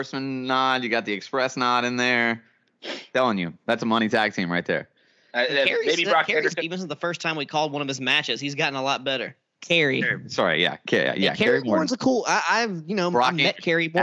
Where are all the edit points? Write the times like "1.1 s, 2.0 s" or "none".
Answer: 6.6 s, 9.6 s